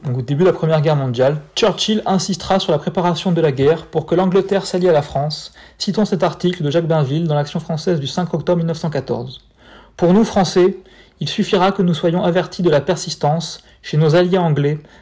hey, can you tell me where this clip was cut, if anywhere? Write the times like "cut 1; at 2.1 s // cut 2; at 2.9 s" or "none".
none